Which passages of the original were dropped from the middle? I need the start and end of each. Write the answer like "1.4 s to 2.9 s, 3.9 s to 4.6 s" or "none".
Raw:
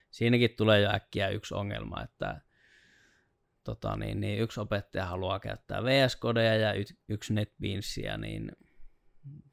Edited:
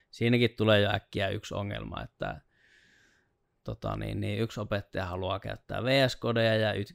none